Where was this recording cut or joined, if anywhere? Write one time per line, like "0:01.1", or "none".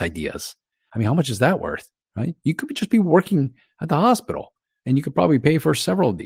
none